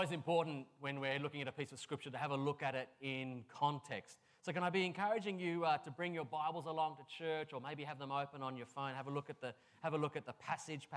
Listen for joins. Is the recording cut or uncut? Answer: uncut